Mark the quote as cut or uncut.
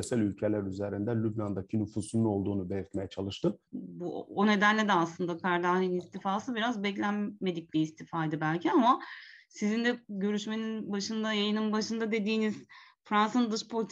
cut